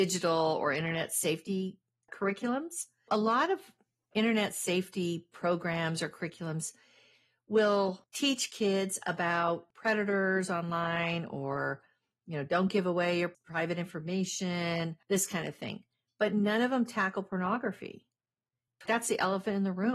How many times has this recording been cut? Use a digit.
2